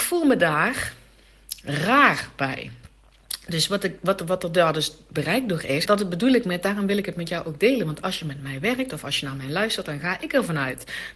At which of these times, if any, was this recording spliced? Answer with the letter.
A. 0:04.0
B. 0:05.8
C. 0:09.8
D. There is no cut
B